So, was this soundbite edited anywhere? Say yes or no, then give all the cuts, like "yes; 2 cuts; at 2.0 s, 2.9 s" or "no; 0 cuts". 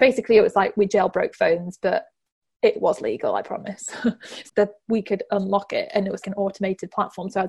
yes; 2 cuts; at 4.5 s, 6.2 s